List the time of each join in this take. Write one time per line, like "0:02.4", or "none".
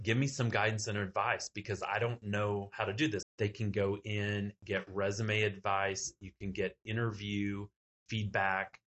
0:03.2

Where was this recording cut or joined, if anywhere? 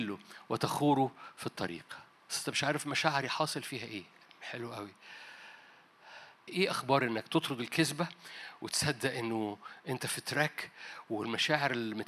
0:06.5

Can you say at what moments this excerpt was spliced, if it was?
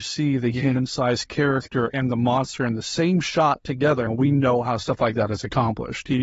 0:04.1

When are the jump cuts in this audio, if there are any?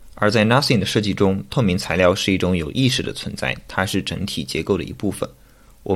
none

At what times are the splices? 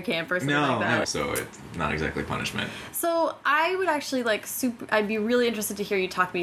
0:01.0

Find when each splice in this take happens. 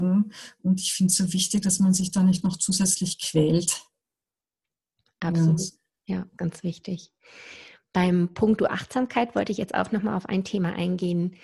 0:06.4

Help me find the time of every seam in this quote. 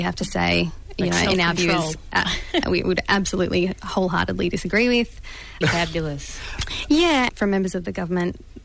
0:02.6
0:05.6
0:07.3

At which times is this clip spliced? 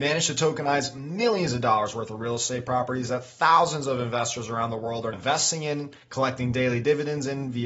0:05.1

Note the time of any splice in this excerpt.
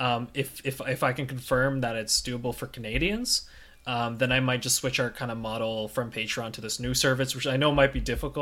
none

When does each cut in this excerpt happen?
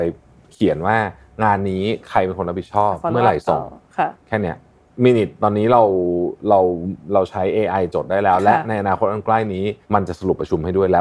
0:09.8

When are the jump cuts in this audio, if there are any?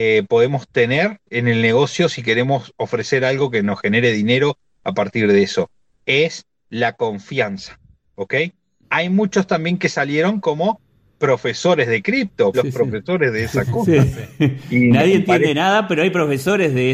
0:01.3
0:08.8
0:12.5

